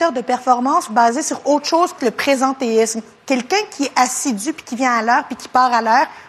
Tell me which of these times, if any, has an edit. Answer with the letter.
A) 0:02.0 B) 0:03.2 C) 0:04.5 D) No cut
A